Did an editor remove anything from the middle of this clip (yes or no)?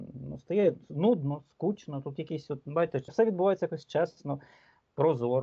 yes